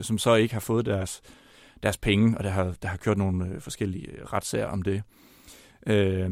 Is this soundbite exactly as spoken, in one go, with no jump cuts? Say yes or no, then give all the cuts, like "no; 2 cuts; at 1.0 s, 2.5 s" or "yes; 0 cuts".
yes; 0 cuts